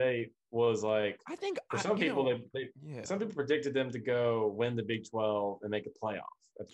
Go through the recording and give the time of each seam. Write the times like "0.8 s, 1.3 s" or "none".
none